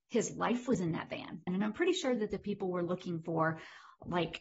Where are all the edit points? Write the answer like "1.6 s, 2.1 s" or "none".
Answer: 1.5 s